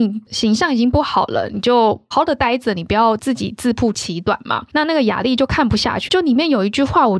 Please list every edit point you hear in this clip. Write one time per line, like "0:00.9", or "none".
0:02.1
0:04.7
0:06.1